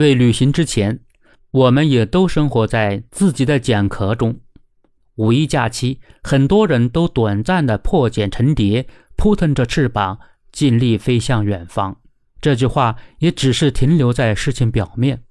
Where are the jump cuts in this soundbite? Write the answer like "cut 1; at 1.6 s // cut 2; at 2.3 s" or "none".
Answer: cut 1; at 5.0 s // cut 2; at 12.4 s